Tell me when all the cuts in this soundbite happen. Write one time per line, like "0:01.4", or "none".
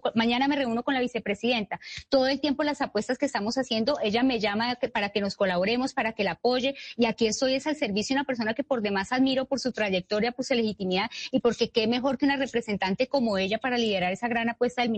none